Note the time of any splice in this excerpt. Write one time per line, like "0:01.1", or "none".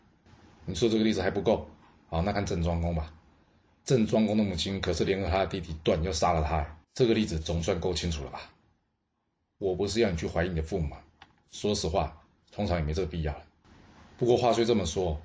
0:02.3
0:06.8
0:12.4